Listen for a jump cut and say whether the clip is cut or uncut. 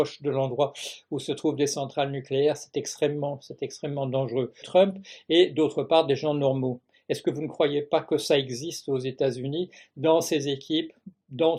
cut